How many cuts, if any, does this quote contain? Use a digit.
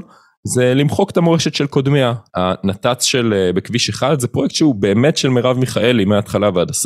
1